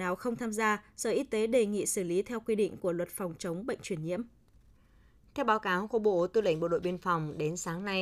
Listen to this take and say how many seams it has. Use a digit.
0